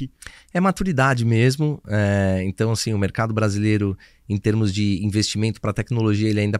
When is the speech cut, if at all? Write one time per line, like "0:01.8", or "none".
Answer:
none